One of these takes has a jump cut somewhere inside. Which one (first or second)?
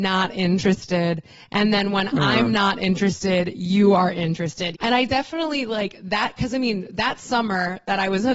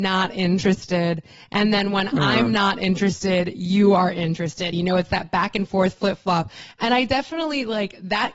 first